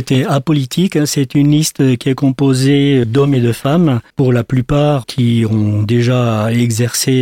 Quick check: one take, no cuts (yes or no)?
no